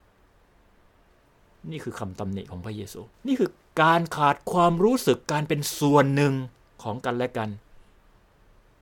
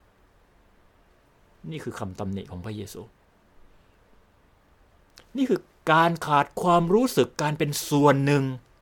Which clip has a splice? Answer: first; 1 cut; at 3.1 s

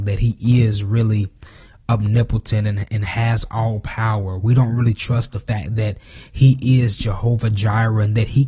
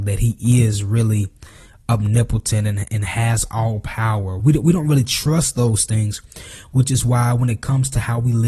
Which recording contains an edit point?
second; 1 cut; at 4.4 s

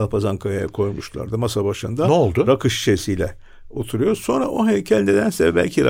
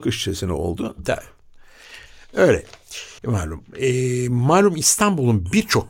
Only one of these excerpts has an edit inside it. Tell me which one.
second; 1 cut; at 3.2 s

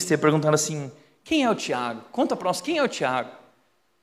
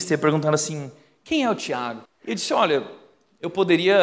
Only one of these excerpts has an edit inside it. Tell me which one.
second; 1 cut; at 2.1 s

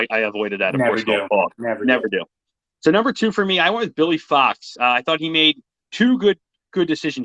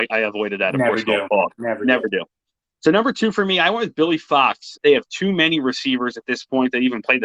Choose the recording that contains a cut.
second; 1 cut; at 4.8 s

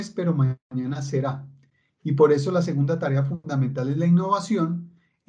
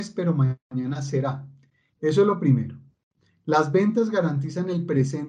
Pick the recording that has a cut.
second; 1 cut; at 1.9 s

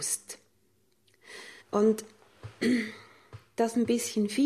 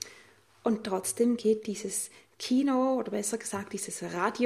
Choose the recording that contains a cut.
first; 1 cut; at 1.6 s

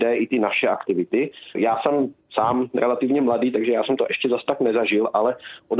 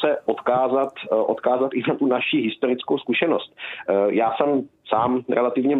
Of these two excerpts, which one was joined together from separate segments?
first; 1 cut; at 1.5 s

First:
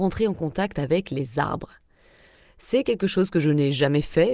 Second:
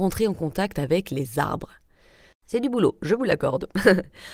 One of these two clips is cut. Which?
second; 1 cut; at 2.3 s

